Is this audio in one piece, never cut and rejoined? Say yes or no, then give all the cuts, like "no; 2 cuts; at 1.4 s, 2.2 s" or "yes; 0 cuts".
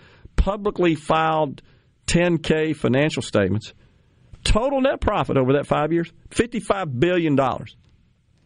yes; 0 cuts